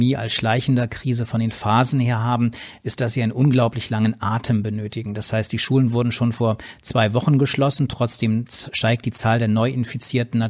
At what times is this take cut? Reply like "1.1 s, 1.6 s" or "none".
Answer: none